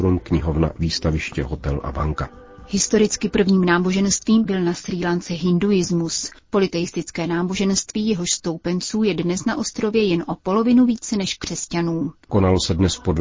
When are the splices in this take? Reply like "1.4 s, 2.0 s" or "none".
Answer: 12.3 s